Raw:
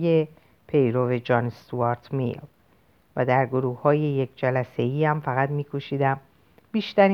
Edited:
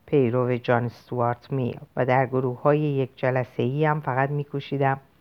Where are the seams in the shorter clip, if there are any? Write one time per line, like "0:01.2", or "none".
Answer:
0:01.9